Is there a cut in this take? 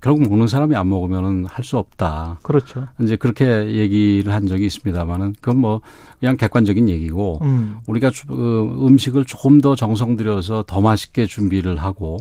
no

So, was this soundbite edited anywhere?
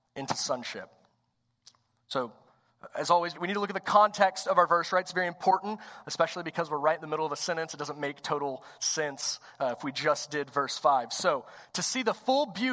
yes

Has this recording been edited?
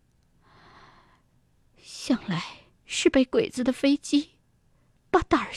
yes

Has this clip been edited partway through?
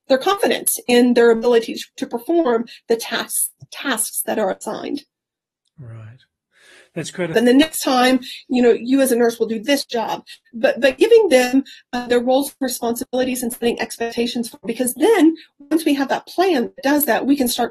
yes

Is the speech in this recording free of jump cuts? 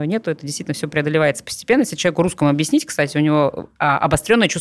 yes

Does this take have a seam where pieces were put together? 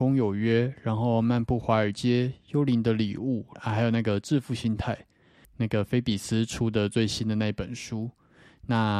yes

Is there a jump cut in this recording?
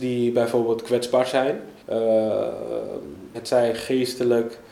yes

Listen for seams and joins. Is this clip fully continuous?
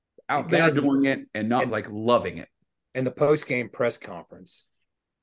no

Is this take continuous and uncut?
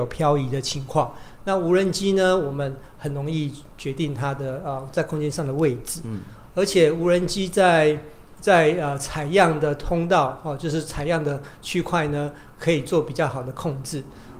yes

